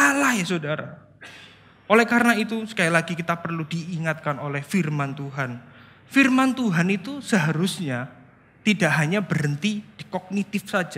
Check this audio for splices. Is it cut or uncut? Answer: cut